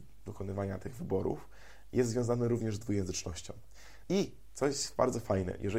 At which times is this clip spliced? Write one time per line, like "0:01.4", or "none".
0:04.0

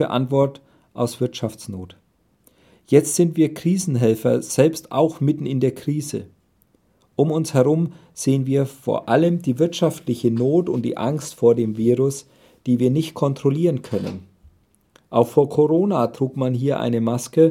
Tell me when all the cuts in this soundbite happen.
none

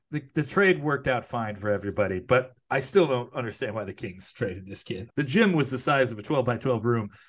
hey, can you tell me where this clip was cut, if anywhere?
0:05.1

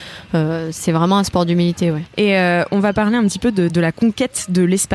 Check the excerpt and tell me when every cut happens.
0:02.1
0:03.7

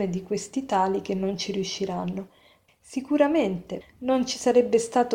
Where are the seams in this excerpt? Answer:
0:02.7
0:03.8

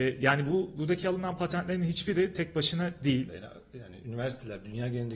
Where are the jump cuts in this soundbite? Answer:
0:03.3

